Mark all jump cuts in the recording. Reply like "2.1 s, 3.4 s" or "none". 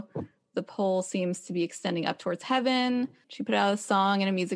3.2 s